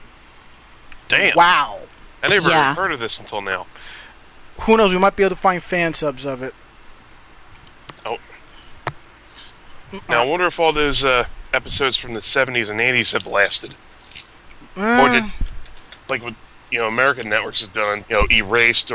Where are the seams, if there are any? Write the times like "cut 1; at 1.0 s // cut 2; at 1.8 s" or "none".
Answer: cut 1; at 16.0 s // cut 2; at 18.0 s